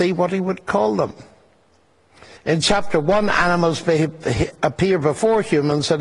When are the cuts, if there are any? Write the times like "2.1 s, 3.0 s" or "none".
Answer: 2.4 s

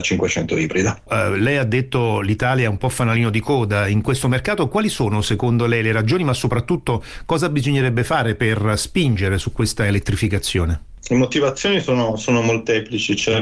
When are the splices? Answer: 1.1 s

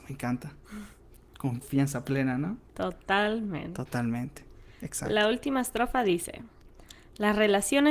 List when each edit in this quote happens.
none

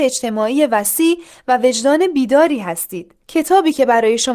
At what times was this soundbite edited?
3.2 s

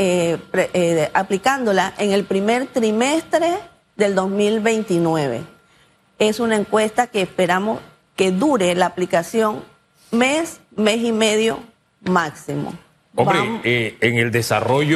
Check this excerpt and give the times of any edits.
none

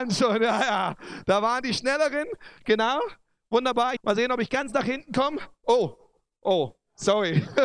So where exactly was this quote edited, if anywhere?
4.0 s

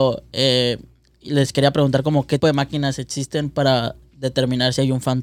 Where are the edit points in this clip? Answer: 2.4 s

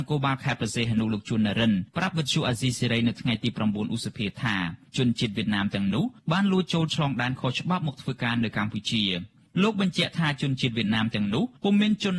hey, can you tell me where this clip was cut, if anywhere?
none

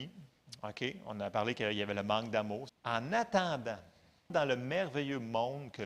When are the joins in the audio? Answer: 2.7 s, 4.3 s

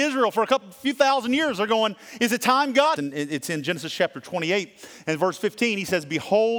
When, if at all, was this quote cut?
3.0 s

